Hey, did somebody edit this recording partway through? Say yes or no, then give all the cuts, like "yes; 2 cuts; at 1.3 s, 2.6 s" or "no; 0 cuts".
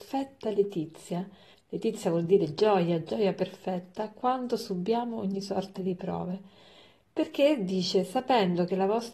yes; 1 cut; at 1.5 s